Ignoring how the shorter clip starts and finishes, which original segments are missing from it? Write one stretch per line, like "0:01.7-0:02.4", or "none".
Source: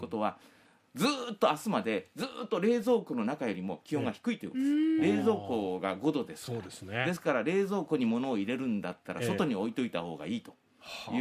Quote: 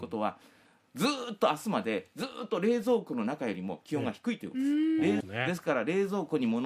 0:05.2-0:06.8